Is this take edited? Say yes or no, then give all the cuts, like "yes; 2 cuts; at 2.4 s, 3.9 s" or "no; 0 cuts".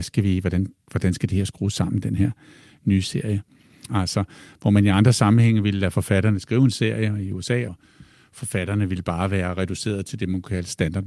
yes; 2 cuts; at 3.9 s, 7.7 s